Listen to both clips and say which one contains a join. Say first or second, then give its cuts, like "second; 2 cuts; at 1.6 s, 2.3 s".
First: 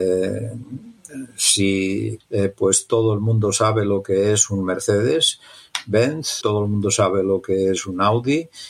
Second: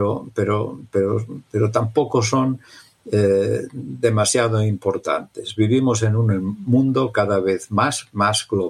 first; 2 cuts; at 2.2 s, 6.4 s